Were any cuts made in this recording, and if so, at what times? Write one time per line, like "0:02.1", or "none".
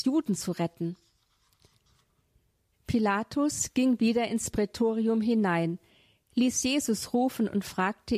0:02.7

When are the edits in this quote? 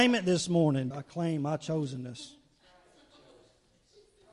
0:00.9

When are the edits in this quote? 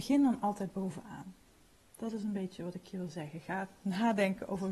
none

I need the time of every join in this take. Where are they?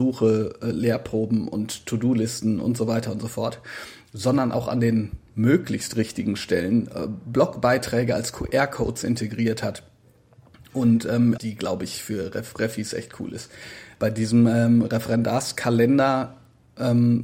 0:11.4
0:14.0

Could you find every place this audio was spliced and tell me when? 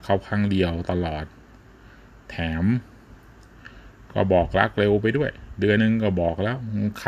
0:05.8

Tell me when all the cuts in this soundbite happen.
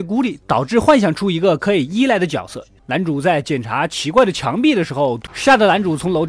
0:02.8
0:05.3

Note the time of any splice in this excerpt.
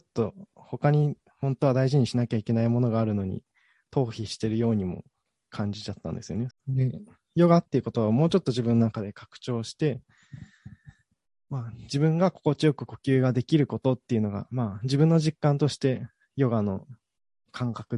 0:06.5

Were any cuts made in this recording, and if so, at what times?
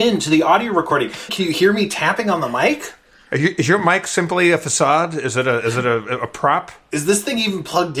0:01.3

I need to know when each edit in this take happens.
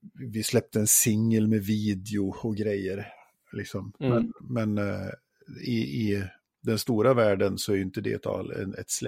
none

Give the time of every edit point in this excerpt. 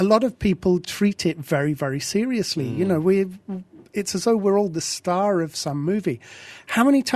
none

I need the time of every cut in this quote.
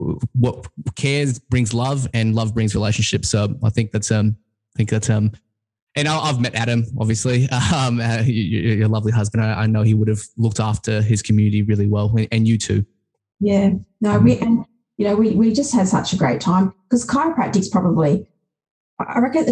none

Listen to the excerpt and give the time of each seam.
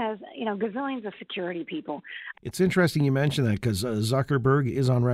0:02.3

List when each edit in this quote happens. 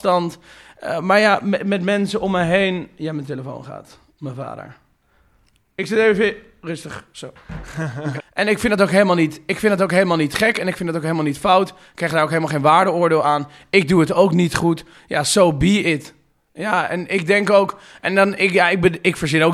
0:08.2

